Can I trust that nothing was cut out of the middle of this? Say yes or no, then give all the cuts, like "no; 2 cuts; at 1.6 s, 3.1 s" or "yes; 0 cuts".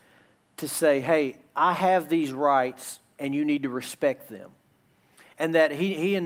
yes; 0 cuts